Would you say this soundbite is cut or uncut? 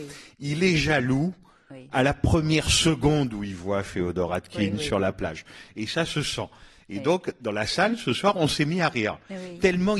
uncut